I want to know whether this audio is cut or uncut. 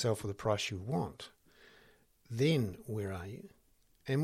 uncut